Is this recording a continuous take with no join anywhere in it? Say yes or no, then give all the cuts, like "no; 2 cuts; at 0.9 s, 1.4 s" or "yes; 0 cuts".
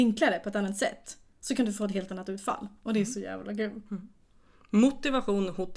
yes; 0 cuts